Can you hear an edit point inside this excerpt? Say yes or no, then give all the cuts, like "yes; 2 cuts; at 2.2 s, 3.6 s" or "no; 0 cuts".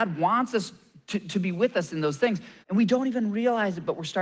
yes; 1 cut; at 2.6 s